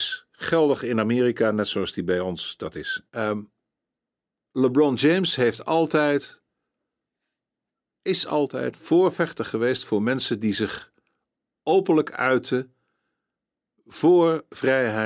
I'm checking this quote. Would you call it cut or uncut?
cut